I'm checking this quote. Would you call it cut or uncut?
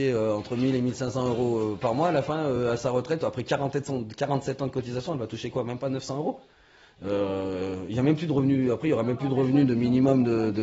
uncut